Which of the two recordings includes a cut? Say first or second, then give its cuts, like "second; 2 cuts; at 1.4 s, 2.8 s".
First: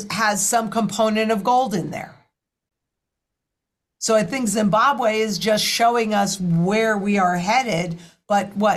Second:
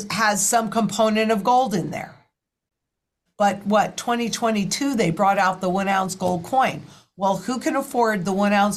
second; 1 cut; at 3.3 s